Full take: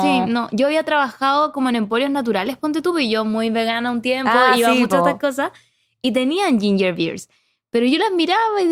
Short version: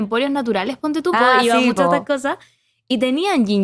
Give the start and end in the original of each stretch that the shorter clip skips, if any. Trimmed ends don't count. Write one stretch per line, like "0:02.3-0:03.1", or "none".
0:02.9-0:04.3